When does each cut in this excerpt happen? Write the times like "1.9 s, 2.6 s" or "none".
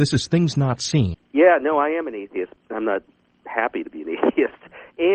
1.1 s, 2.6 s